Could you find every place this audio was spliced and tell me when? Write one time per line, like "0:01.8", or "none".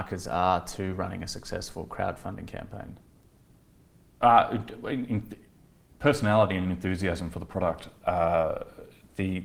0:05.1
0:08.0